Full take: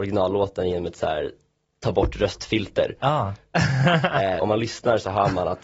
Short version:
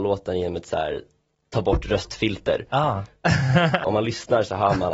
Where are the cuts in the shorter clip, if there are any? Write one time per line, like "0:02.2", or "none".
0:03.8